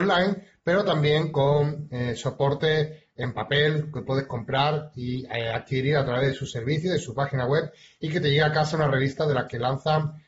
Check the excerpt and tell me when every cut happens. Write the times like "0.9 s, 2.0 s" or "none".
none